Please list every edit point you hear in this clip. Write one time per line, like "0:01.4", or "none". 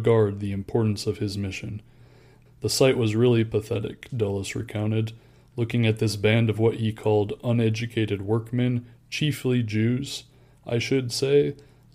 0:02.5